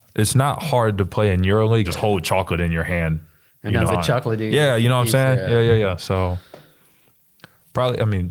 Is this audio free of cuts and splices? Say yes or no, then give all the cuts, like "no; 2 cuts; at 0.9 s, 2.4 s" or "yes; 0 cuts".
no; 2 cuts; at 1.8 s, 3.9 s